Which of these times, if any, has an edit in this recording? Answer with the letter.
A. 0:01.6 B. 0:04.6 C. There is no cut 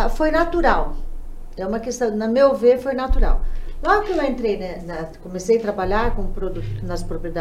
C